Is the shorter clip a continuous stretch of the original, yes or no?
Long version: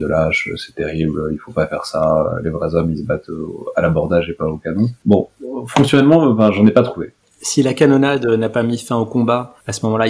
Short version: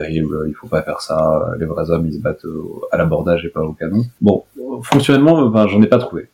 yes